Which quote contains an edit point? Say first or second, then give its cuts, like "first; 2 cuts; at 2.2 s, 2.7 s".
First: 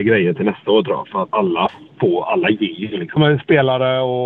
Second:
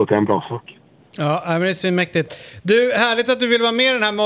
first; 2 cuts; at 1.3 s, 3.2 s